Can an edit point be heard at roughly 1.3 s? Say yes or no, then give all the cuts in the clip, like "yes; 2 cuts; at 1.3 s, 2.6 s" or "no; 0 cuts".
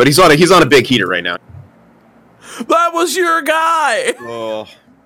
yes; 1 cut; at 1.3 s